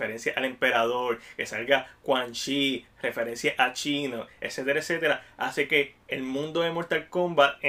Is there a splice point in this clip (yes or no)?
no